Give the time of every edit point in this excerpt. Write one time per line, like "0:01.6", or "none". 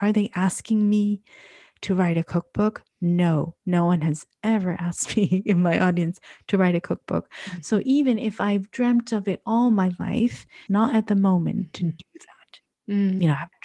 0:10.7